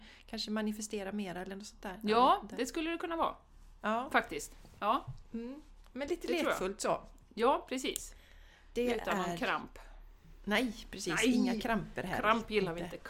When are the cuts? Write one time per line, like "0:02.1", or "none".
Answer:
none